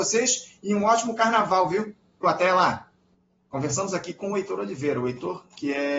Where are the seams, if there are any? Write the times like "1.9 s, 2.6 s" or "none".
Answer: 2.2 s